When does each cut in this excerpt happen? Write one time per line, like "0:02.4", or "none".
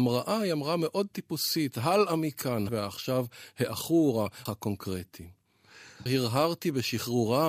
0:02.7
0:04.5
0:06.1